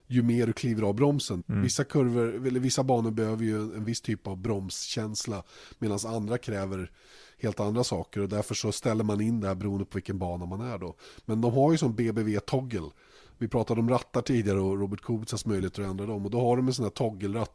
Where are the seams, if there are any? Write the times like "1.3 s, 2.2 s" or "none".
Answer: 1.4 s